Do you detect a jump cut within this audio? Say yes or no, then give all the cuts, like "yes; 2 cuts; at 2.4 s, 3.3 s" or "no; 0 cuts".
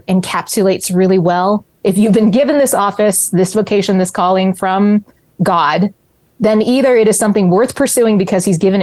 yes; 1 cut; at 1.8 s